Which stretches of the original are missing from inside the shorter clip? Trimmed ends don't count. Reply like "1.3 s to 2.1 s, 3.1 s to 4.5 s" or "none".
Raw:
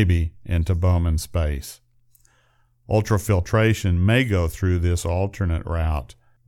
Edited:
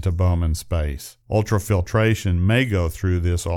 1.8 s to 2.8 s